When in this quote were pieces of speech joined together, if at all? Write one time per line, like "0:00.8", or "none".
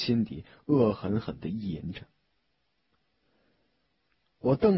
none